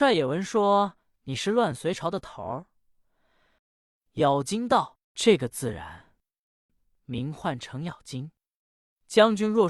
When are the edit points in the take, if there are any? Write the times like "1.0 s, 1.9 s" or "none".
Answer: 3.6 s, 6.7 s

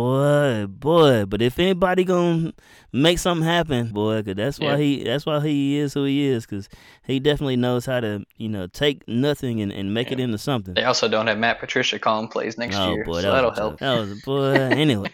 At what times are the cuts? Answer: 3.9 s, 13.8 s

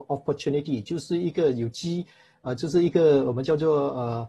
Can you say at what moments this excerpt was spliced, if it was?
none

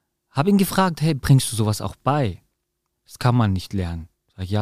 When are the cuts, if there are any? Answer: 2.9 s

